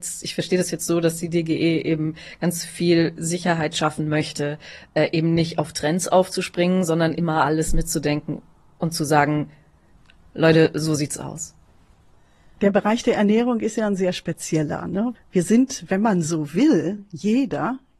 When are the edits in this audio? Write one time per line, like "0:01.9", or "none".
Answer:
0:15.2